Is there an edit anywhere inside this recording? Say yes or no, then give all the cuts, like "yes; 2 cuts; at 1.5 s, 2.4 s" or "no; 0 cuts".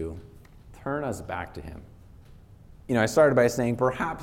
yes; 1 cut; at 2.7 s